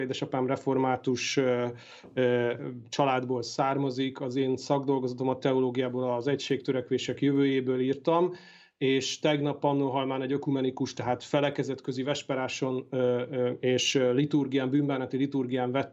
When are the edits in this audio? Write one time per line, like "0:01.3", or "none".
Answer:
none